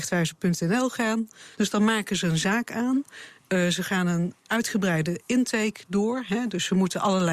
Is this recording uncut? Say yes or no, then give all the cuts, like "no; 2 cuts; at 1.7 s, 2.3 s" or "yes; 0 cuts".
no; 1 cut; at 1.5 s